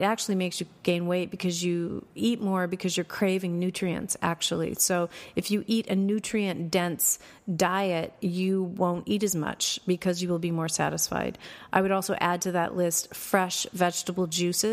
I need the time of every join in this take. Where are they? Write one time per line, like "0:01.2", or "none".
none